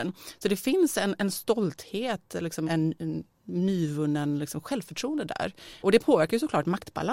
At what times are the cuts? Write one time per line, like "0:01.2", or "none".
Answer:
0:02.7